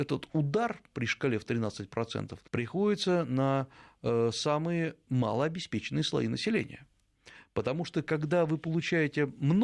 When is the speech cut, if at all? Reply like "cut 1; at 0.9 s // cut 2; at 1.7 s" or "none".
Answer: cut 1; at 2.5 s